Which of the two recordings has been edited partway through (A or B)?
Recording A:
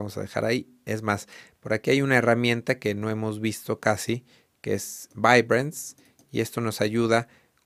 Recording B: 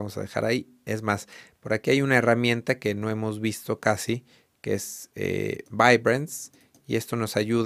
A